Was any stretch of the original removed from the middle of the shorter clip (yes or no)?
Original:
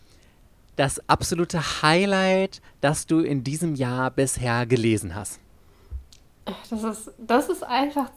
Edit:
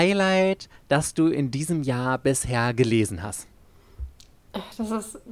no